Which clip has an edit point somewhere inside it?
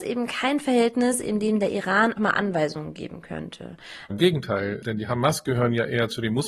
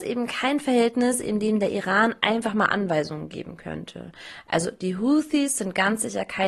first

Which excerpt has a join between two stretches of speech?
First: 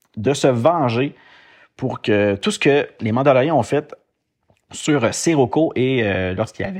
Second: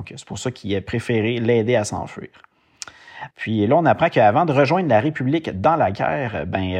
second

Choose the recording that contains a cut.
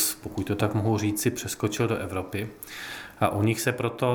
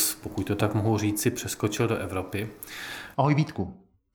second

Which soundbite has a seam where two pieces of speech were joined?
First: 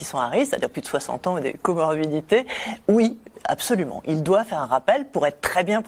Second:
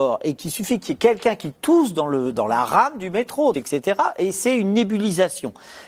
second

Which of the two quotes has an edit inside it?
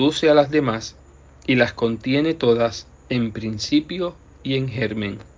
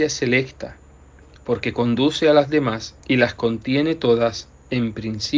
second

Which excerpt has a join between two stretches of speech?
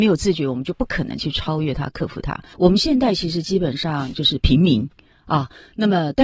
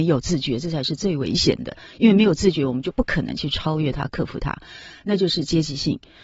first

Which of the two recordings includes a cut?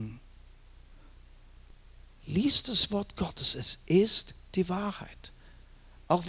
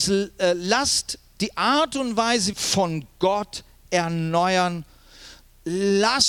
second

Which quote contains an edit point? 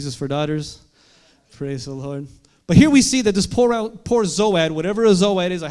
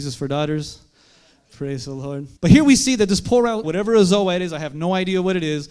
second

